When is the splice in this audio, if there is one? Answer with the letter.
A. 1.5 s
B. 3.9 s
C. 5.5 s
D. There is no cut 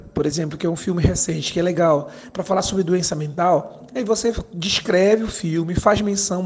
D